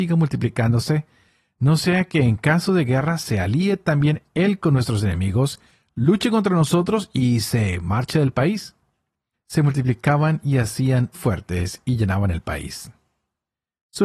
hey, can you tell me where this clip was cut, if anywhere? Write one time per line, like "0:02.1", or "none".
0:09.3
0:11.1